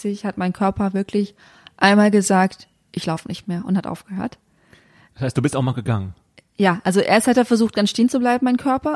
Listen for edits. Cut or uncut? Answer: uncut